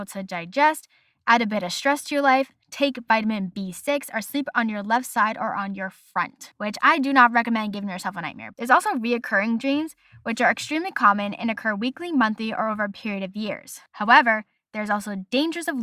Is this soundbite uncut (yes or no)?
no